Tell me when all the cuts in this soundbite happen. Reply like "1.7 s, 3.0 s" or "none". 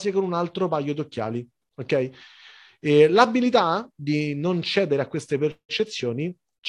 none